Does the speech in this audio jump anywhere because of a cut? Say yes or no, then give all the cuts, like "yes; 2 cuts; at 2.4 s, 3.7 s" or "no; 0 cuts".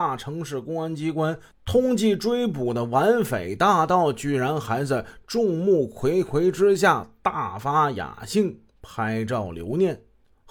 no; 0 cuts